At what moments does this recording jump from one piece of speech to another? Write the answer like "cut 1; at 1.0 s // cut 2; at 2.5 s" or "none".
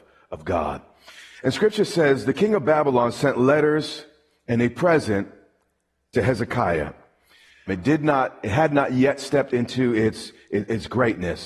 cut 1; at 7.7 s